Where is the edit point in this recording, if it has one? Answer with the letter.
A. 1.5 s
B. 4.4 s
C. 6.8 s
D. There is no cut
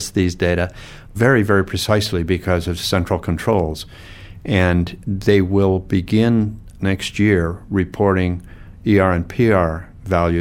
C